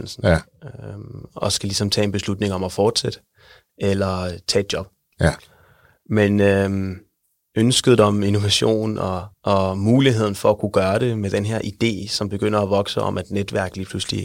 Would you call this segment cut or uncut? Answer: uncut